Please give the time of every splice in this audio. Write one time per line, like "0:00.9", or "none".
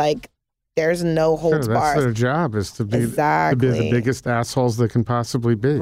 none